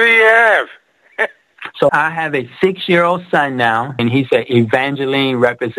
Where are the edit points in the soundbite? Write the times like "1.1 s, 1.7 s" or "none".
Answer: 1.9 s, 4.0 s